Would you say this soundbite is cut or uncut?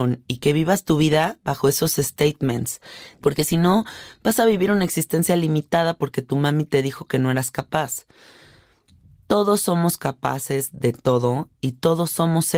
cut